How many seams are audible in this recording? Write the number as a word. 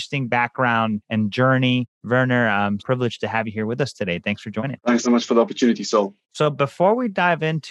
three